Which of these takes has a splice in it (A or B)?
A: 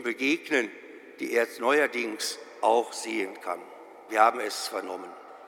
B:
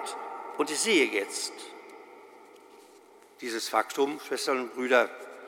A